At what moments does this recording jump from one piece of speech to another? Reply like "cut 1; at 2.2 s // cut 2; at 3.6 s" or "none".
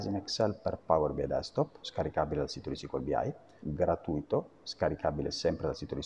cut 1; at 1.8 s // cut 2; at 3.6 s